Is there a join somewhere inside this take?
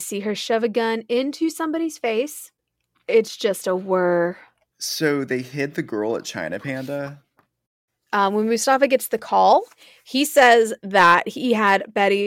no; 0 cuts

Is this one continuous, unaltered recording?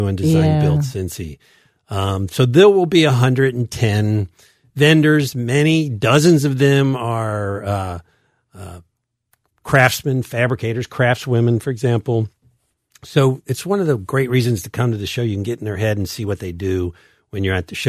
yes; 0 cuts

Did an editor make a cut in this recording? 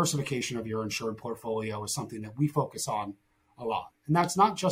no; 0 cuts

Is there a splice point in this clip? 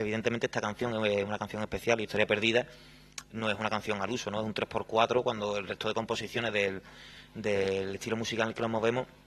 no; 0 cuts

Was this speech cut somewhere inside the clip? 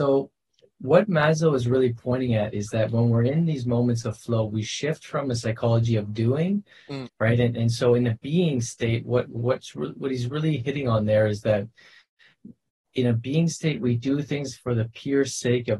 yes; 1 cut; at 7.0 s

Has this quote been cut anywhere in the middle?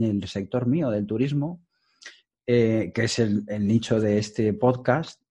no; 0 cuts

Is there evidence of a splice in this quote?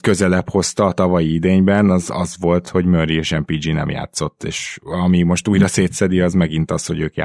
no; 0 cuts

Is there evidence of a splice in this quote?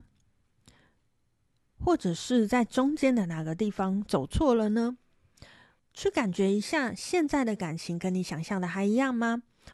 yes; 1 cut; at 5.8 s

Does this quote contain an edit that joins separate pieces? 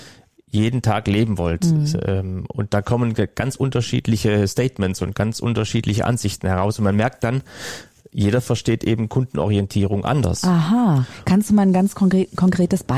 no; 0 cuts

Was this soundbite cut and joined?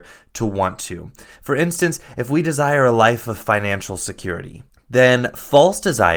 no; 0 cuts

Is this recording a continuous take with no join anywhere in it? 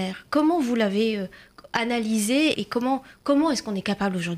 no; 1 cut; at 2.5 s

